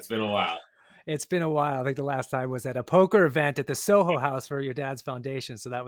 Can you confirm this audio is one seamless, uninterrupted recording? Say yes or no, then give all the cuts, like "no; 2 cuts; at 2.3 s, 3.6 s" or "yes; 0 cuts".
yes; 0 cuts